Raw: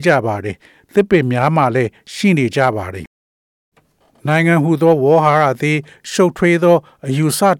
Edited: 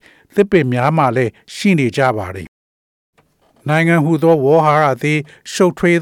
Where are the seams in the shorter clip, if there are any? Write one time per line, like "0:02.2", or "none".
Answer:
none